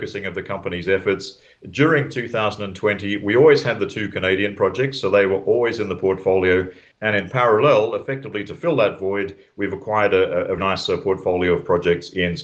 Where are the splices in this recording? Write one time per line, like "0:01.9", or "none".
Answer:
0:06.9
0:10.6